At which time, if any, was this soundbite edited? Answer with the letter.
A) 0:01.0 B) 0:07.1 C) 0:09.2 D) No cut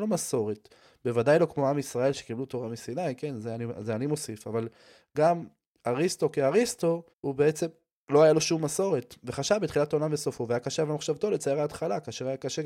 B